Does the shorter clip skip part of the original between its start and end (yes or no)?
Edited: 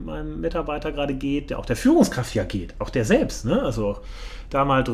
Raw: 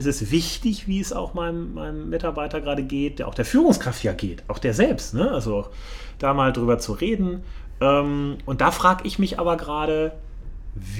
no